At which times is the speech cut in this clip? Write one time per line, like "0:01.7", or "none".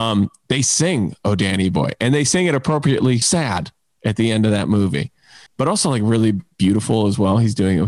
0:03.2
0:05.5